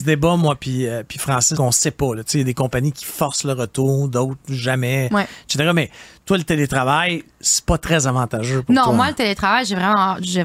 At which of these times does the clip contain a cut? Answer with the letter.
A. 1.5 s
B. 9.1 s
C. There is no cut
A